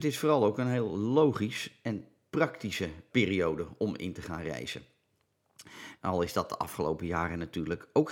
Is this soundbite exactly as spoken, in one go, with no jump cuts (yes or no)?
no